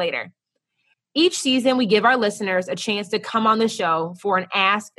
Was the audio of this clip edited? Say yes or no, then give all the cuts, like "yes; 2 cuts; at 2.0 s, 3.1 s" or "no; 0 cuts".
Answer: yes; 1 cut; at 0.9 s